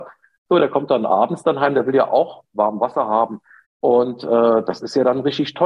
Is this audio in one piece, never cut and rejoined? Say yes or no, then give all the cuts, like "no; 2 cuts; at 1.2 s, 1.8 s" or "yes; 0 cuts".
no; 1 cut; at 3.6 s